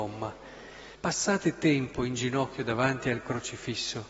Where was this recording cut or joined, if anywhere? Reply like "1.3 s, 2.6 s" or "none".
1.0 s